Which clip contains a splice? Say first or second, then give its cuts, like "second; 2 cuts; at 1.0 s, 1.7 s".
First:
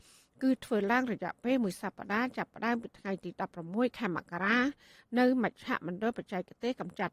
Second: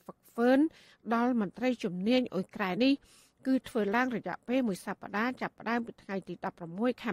second; 1 cut; at 2.8 s